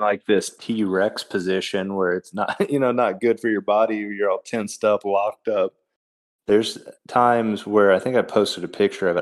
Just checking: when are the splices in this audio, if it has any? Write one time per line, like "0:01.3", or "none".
0:06.3